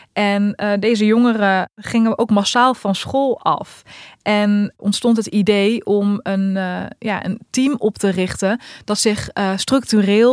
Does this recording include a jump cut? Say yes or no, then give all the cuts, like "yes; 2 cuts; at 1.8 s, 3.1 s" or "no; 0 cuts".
no; 0 cuts